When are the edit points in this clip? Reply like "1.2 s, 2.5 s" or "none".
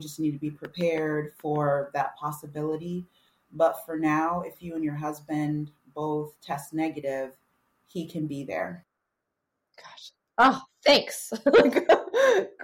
none